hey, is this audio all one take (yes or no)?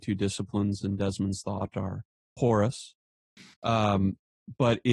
yes